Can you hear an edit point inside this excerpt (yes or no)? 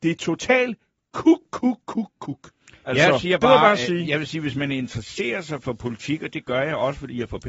no